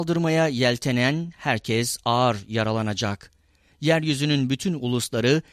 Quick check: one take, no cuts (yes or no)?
yes